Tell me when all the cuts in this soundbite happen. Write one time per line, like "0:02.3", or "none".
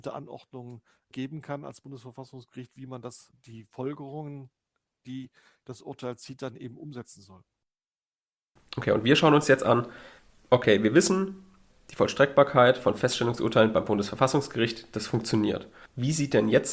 0:03.3